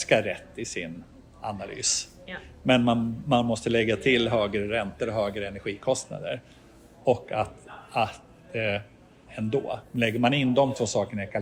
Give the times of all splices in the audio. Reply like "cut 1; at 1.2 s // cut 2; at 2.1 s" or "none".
cut 1; at 9.3 s